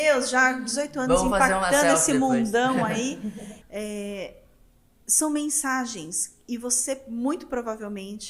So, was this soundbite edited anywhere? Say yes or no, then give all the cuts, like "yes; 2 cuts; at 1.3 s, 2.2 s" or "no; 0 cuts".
yes; 1 cut; at 3.6 s